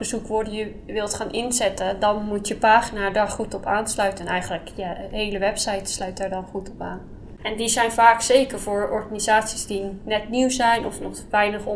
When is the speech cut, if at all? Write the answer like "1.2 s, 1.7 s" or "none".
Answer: 7.4 s